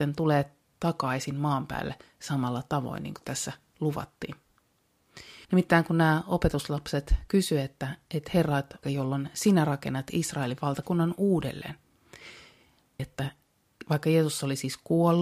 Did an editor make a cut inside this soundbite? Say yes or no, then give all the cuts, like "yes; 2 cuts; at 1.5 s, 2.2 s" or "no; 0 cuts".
yes; 3 cuts; at 5.4 s, 8.8 s, 13.0 s